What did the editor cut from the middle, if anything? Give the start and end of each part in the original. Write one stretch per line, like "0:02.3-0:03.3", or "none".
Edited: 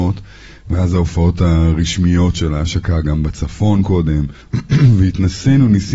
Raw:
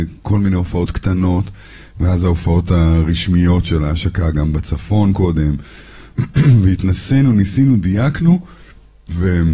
0:05.7-0:06.1